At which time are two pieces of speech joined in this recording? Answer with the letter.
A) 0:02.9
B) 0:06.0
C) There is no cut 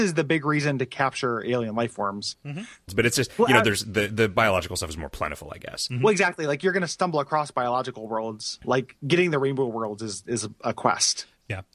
A